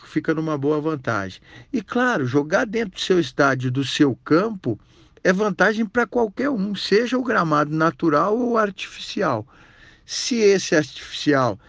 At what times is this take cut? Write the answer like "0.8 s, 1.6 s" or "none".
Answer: none